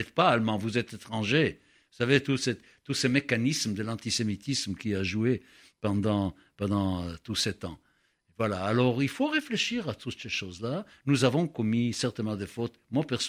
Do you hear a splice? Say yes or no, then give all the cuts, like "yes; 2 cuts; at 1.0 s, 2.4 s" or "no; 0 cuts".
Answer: no; 0 cuts